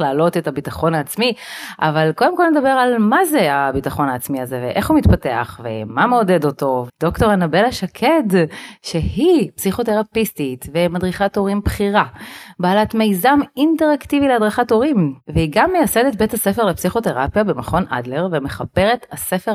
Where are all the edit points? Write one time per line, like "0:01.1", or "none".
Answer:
0:06.9

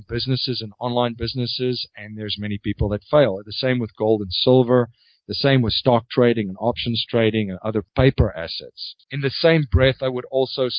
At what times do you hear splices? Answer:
0:09.0

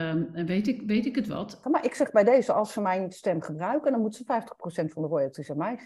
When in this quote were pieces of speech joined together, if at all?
0:01.6

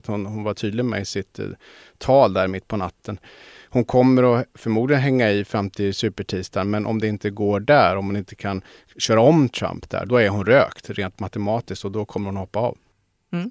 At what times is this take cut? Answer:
0:10.1

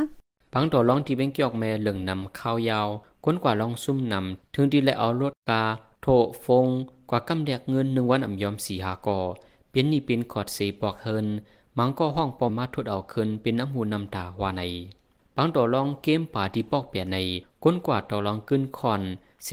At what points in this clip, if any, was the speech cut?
0:12.5

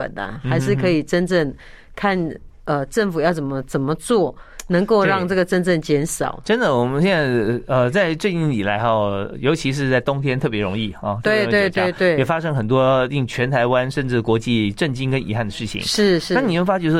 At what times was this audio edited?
none

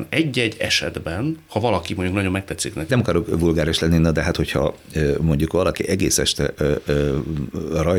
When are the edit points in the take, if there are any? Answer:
0:02.9

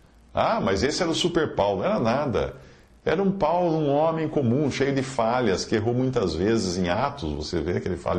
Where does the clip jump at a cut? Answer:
none

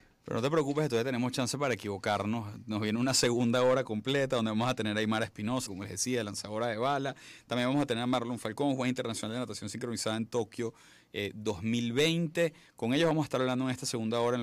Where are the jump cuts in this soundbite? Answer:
0:05.7

